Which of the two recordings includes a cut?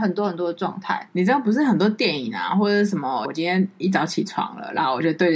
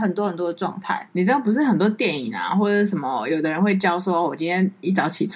first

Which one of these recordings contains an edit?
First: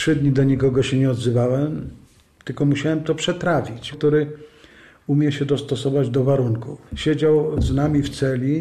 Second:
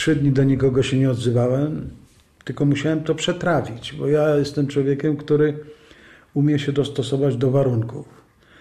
first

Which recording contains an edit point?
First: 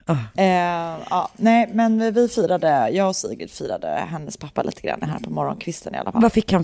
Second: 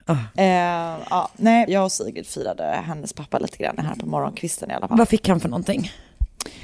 second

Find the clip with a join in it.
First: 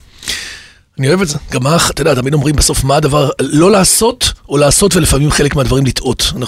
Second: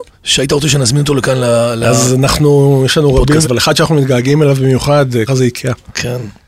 second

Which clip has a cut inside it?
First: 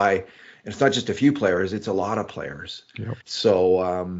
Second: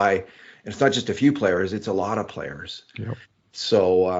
first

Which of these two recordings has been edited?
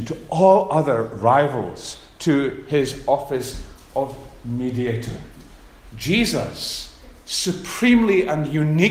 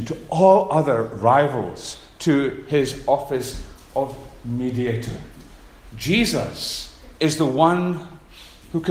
second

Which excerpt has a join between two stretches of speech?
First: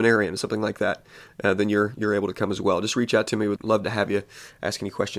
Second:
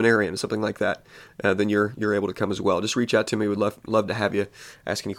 first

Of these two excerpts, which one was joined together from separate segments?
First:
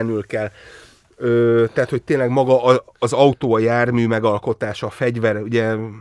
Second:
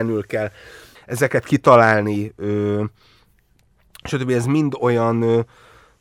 second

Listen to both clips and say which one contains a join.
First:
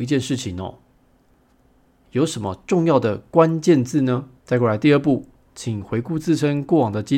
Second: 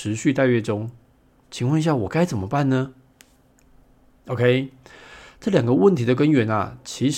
first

